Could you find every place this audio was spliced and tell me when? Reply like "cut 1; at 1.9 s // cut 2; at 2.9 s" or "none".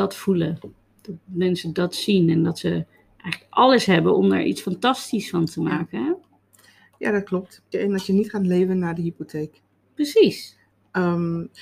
cut 1; at 7.7 s